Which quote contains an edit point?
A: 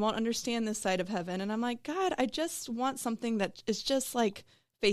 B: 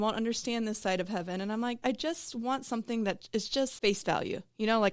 B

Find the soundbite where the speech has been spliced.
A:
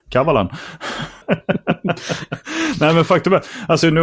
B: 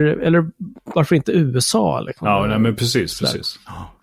A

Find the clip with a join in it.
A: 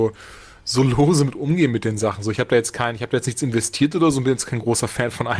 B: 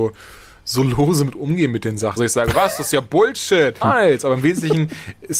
B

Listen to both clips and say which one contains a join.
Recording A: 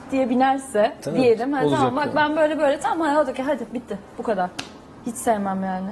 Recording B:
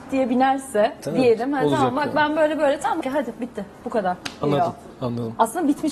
B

